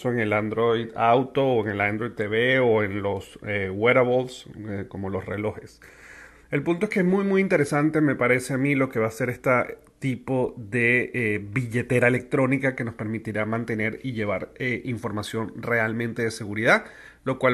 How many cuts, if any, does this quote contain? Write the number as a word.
zero